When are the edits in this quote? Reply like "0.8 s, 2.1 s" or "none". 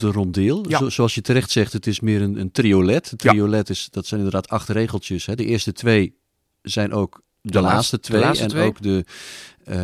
none